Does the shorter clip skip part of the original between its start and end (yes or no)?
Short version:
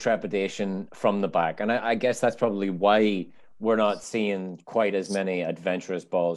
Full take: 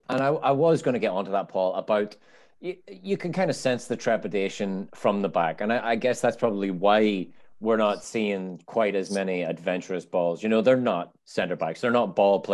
no